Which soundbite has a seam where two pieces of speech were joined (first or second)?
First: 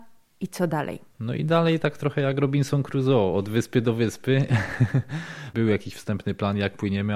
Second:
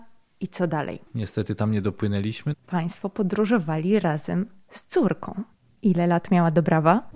second